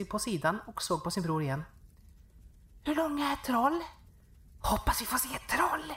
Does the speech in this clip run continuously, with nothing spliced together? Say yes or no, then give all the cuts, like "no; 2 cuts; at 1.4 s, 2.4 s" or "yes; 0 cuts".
no; 1 cut; at 4.6 s